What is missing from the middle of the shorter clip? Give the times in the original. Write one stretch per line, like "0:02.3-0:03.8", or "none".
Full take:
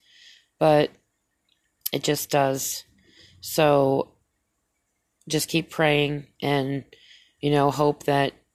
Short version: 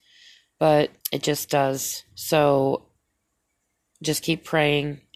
0:01.0-0:01.8
0:02.9-0:03.4